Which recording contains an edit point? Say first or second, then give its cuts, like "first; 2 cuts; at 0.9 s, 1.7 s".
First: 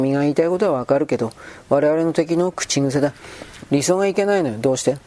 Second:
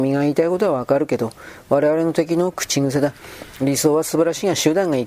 first; 1 cut; at 3.6 s